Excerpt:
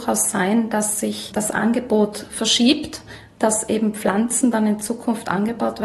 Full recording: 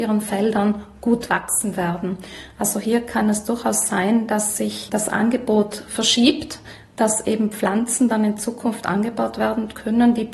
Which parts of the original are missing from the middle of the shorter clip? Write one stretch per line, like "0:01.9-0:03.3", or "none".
none